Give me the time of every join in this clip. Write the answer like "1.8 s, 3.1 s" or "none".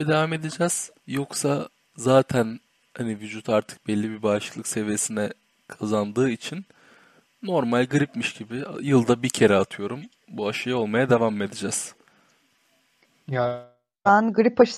1.0 s